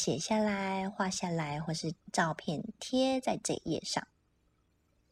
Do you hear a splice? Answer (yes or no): no